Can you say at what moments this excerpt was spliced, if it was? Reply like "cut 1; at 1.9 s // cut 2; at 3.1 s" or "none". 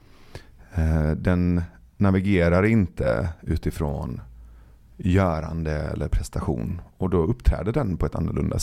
none